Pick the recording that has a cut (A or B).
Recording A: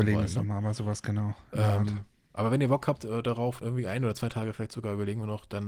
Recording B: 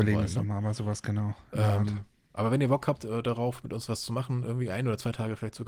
A